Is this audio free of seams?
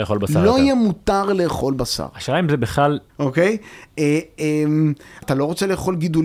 no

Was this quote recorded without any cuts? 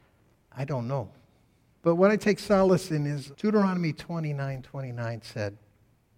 no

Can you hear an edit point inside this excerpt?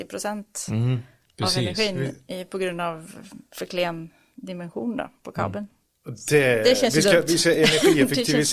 no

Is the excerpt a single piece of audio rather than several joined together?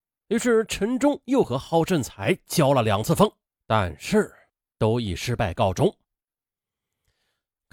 yes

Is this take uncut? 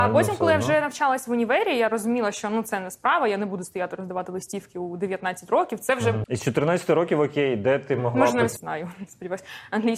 no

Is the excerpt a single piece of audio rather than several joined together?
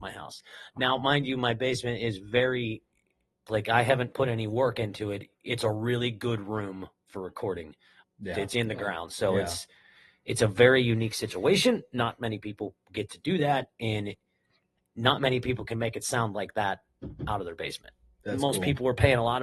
no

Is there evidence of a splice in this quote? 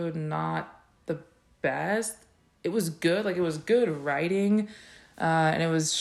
no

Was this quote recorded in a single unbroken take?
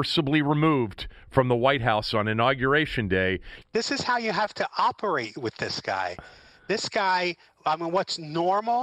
no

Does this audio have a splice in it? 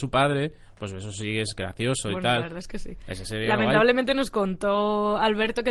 no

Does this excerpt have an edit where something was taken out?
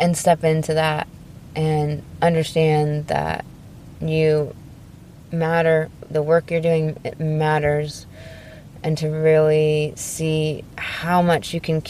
no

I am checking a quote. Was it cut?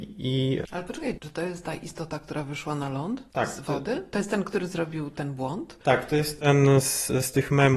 yes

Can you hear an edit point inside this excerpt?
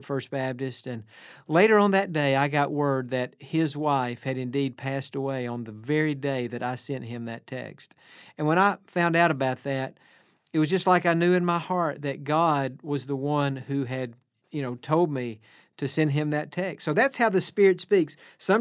no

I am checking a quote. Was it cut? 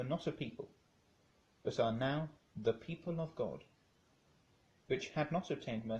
no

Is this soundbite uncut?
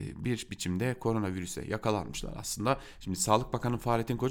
no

